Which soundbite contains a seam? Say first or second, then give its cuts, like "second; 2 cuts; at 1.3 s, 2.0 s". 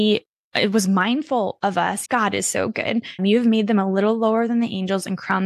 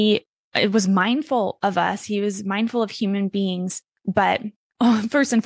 first; 2 cuts; at 2.1 s, 3.2 s